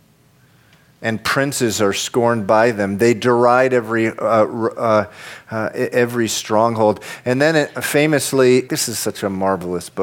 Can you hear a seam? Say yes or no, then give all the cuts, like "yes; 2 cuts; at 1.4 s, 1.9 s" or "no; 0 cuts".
yes; 1 cut; at 8.7 s